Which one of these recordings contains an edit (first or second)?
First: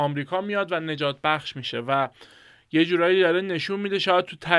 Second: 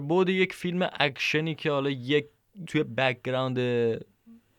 second